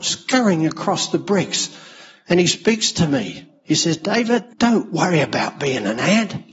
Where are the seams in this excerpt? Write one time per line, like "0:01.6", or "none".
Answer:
0:04.5